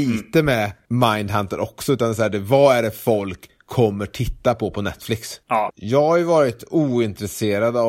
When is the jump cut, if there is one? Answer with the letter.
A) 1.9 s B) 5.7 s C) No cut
B